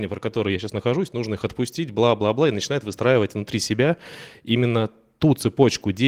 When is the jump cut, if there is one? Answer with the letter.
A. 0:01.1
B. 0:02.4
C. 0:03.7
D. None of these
D